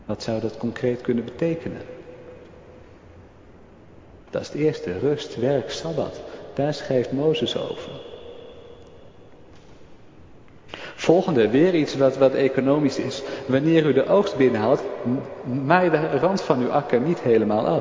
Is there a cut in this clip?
no; 0 cuts

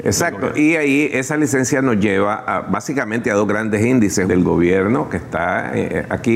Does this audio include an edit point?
yes; 1 cut; at 4.2 s

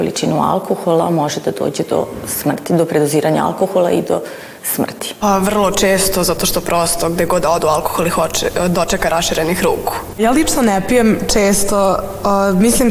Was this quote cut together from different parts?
yes; 2 cuts; at 5.2 s, 10.1 s

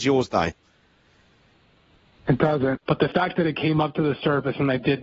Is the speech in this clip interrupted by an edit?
yes; 1 cut; at 2.8 s

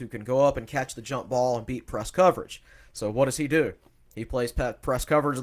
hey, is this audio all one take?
yes; 0 cuts

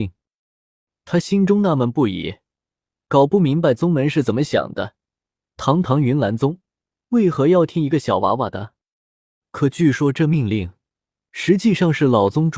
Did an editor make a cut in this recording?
no; 0 cuts

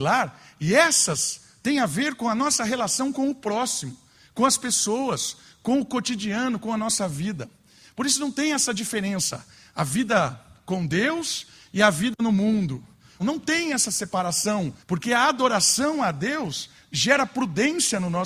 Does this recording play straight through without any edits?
no; 2 cuts; at 13.2 s, 14.8 s

